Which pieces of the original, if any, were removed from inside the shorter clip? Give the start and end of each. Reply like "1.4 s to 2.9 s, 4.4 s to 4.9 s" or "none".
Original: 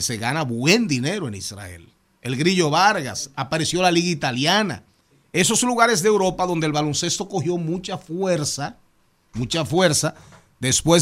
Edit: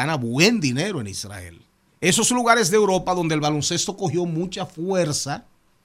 2.1 s to 5.2 s